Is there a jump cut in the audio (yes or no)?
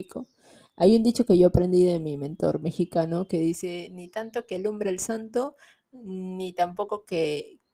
no